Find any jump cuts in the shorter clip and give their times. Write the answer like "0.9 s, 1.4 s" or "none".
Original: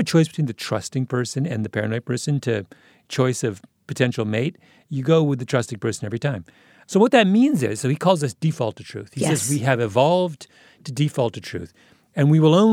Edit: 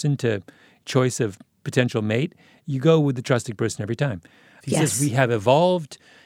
4.6 s

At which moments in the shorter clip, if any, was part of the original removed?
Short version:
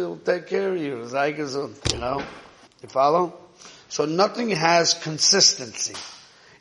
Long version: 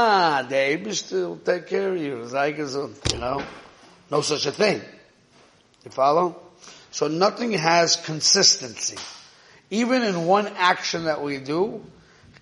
2.7 s

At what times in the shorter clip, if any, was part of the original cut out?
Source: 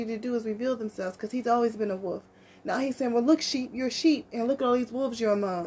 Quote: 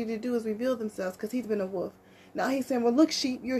1.4 s

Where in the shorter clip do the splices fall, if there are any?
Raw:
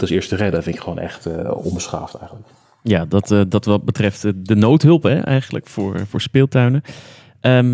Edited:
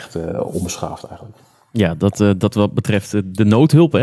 none

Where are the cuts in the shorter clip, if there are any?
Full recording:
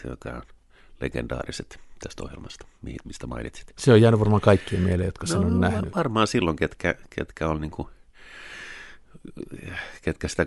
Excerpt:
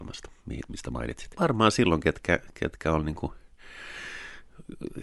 1.4 s

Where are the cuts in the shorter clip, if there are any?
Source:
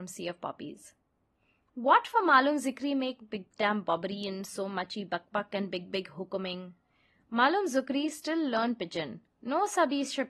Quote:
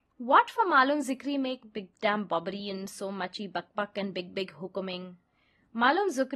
none

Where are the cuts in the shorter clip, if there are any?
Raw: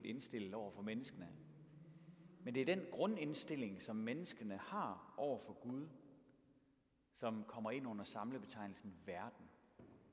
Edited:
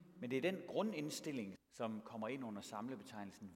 1.5 s

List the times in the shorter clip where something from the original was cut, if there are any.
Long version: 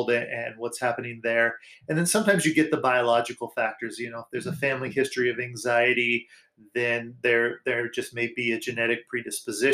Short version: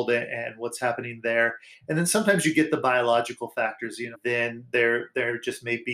4.1 s

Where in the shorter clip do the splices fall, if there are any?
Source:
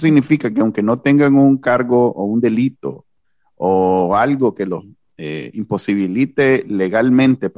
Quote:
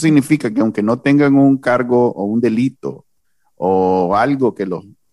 none

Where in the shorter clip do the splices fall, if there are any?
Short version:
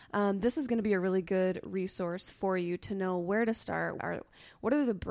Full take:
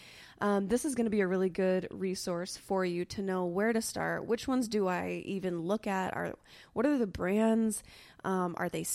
4.0 s

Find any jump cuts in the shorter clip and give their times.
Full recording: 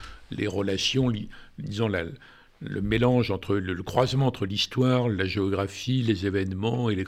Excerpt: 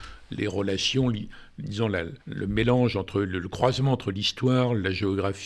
2.2 s

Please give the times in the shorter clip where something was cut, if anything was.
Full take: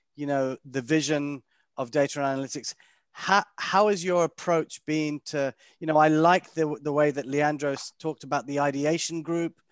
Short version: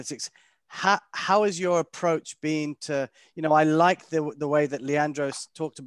none

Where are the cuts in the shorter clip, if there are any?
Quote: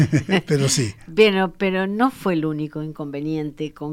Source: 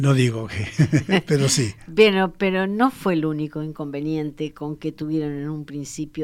none

